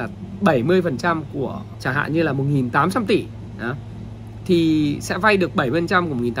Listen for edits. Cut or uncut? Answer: cut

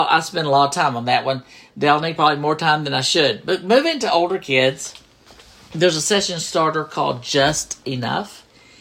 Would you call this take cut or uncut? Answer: uncut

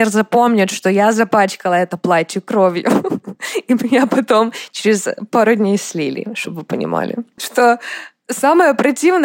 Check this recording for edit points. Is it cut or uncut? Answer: cut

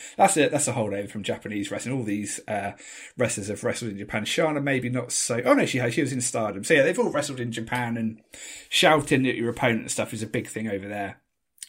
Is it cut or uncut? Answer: uncut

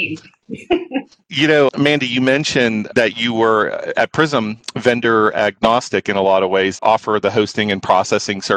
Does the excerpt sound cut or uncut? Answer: cut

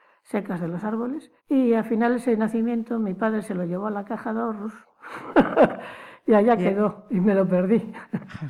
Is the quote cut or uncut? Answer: cut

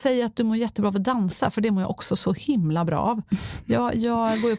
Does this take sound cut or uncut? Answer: uncut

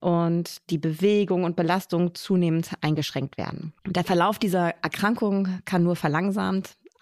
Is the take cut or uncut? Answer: cut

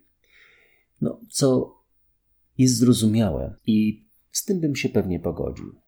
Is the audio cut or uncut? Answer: cut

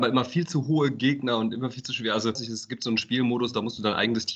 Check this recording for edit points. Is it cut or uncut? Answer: cut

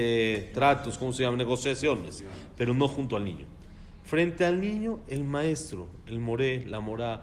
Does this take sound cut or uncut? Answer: uncut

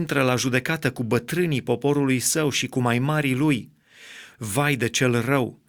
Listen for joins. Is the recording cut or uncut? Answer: cut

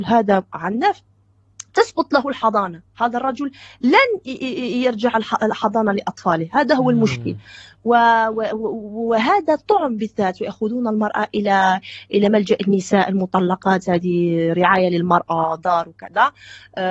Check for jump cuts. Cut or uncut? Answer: uncut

